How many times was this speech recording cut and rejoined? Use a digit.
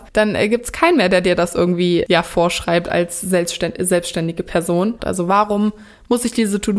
1